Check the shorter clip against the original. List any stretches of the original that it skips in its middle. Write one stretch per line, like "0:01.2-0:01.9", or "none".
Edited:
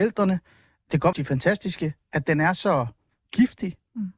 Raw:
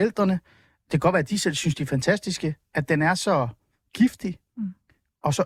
0:01.1-0:01.7

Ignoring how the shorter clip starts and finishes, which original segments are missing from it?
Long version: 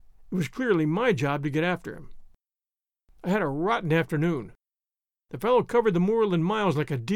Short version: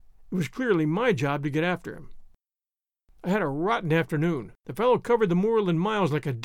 0:04.6-0:05.2

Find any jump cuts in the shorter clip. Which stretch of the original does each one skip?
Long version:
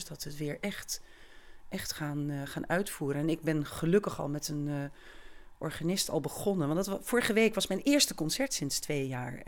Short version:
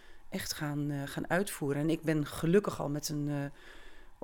none

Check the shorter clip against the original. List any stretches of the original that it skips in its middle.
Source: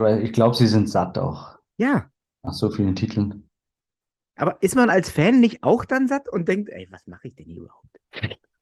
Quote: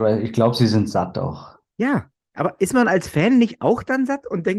0:02.3-0:04.3

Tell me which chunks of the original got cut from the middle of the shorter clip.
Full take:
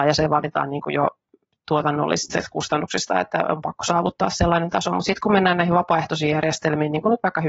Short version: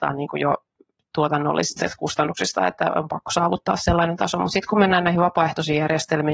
none

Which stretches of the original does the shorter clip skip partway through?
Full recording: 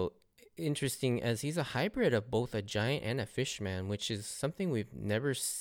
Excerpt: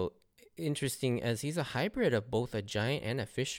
none

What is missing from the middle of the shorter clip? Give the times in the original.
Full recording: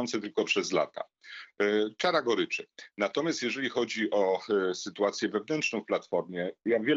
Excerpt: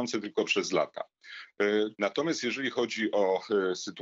0:01.9-0:02.9

